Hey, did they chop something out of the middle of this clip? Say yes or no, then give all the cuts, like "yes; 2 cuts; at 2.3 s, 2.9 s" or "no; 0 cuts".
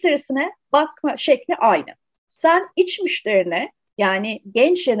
yes; 1 cut; at 2.3 s